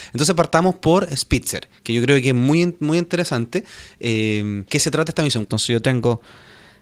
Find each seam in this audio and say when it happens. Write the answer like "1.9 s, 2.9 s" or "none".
5.4 s